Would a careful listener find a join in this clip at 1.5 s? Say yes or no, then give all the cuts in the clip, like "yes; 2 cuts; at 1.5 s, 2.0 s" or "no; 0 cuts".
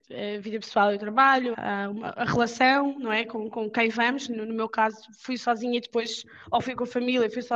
yes; 1 cut; at 1.5 s